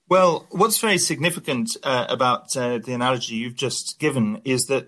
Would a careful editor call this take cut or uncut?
uncut